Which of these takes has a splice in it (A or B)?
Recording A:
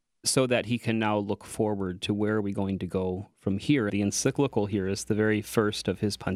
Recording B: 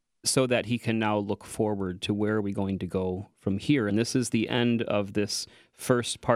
A